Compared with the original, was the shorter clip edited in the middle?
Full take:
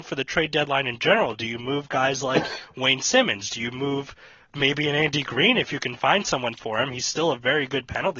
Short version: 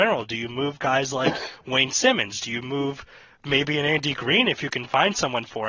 no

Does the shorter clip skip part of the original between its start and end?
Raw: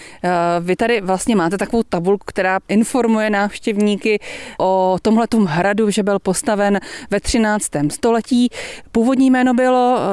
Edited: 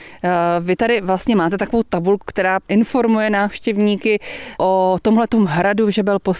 no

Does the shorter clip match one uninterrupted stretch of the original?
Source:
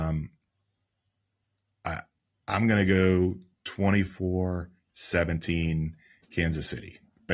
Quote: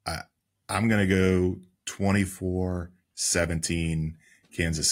yes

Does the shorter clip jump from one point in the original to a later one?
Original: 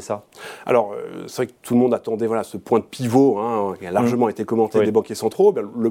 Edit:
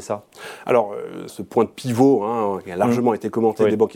yes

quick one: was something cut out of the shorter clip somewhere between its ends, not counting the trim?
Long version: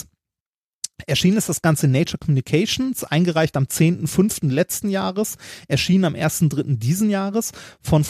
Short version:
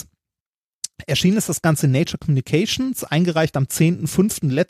no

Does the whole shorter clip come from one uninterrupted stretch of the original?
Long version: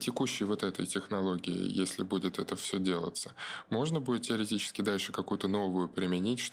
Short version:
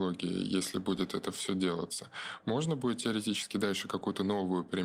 yes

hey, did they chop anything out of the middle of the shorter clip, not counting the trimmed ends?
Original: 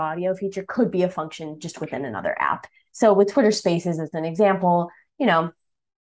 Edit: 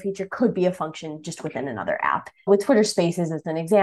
yes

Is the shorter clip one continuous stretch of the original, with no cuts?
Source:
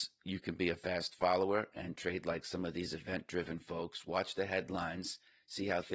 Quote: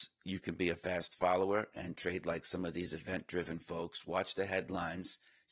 yes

